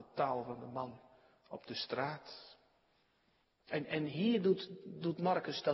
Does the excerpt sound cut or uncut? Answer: cut